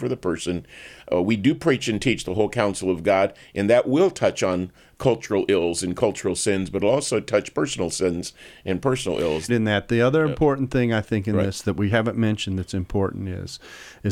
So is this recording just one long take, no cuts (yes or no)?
no